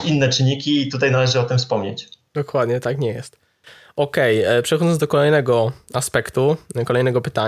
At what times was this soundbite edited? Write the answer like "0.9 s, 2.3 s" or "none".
none